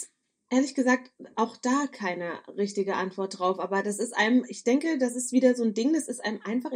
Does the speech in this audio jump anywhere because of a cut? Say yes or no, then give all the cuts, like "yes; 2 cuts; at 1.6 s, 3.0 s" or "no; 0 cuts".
no; 0 cuts